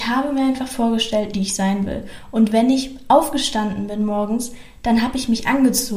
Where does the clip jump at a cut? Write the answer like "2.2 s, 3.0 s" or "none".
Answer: 1.3 s